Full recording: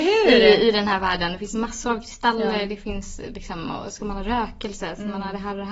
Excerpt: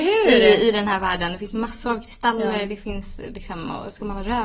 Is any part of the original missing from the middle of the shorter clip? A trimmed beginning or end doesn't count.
no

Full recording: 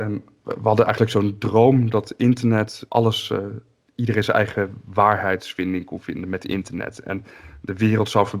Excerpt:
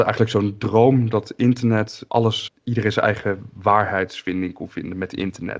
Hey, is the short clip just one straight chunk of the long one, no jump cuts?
no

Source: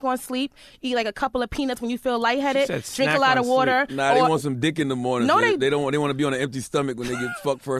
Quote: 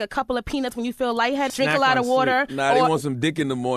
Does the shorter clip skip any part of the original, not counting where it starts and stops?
yes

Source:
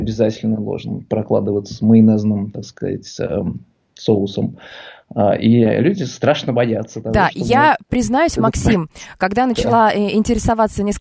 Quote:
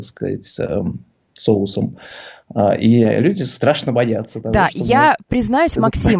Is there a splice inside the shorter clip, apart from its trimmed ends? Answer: no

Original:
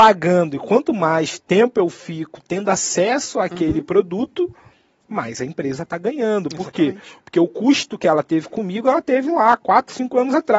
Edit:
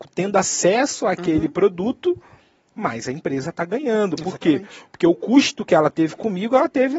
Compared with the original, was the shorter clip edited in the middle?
no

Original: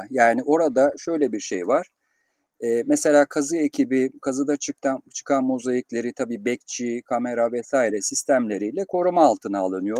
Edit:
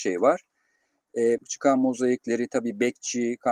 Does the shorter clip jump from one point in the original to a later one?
yes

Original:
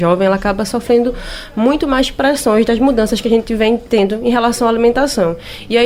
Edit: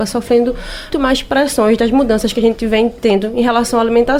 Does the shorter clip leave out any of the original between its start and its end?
yes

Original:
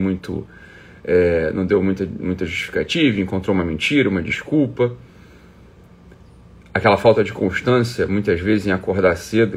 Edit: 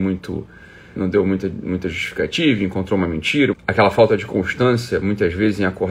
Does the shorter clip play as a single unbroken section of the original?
no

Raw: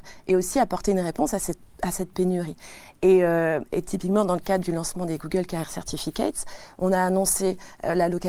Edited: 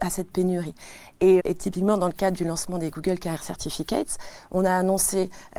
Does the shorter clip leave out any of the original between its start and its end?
yes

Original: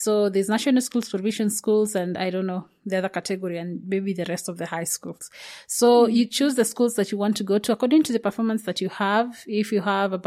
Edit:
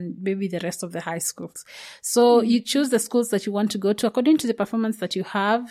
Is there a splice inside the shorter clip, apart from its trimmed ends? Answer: no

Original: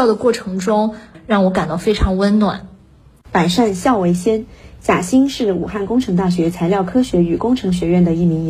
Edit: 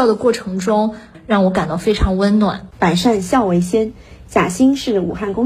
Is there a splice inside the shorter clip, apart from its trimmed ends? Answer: yes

